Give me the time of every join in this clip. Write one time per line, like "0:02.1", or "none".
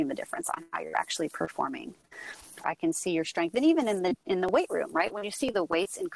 0:02.6